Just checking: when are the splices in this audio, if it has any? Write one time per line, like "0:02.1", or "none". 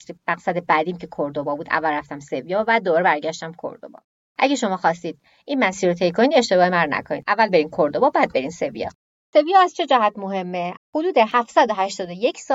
0:10.8